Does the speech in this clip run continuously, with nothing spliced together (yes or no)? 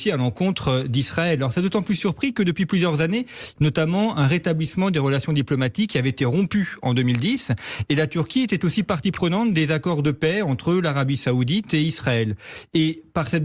no